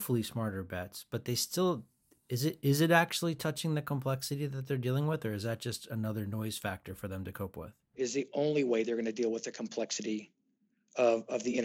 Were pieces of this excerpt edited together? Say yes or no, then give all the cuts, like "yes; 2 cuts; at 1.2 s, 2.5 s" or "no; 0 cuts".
yes; 1 cut; at 7.9 s